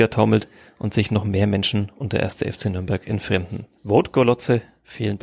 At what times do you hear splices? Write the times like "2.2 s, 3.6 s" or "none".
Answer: 3.8 s